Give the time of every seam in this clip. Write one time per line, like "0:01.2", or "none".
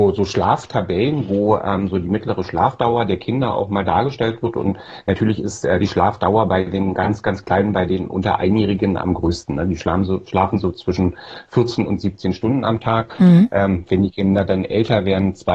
none